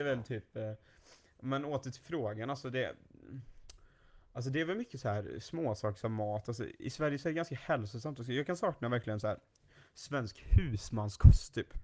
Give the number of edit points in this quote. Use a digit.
1